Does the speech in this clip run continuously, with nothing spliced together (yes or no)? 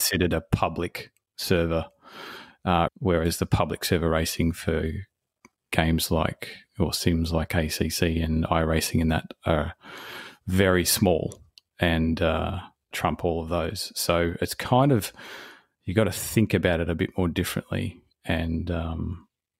no